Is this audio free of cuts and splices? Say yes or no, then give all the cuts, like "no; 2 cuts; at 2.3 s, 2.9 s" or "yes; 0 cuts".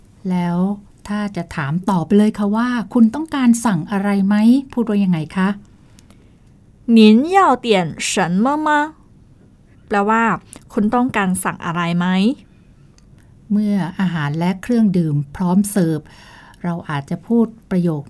no; 1 cut; at 9.7 s